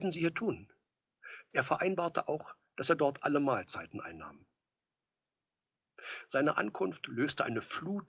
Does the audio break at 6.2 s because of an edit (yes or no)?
no